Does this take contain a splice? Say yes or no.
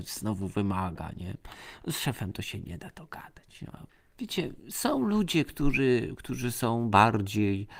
no